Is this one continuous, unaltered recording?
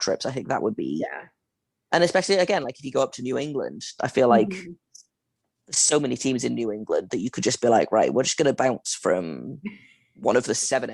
yes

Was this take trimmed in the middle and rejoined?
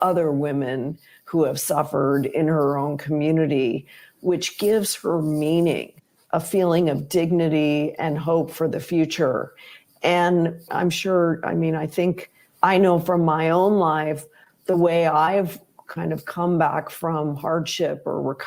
yes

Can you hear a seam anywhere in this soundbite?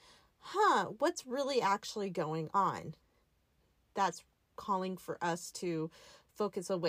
no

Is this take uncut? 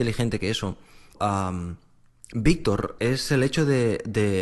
no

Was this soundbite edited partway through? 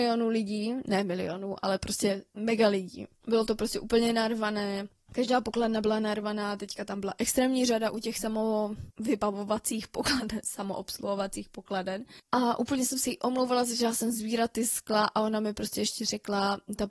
no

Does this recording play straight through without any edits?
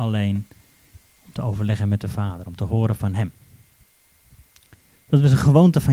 yes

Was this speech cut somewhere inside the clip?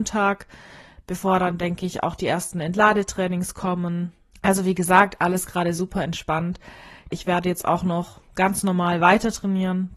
yes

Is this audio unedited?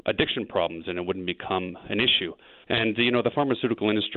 no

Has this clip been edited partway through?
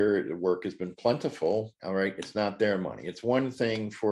yes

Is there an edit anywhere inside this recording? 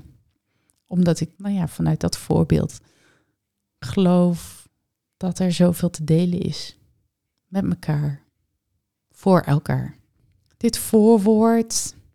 yes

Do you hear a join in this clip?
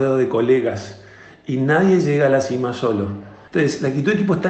yes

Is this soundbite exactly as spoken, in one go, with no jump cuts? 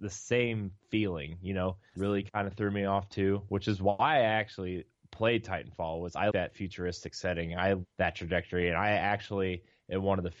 no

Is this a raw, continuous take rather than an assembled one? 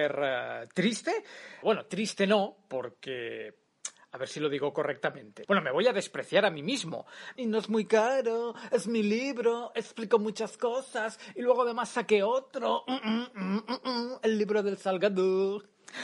no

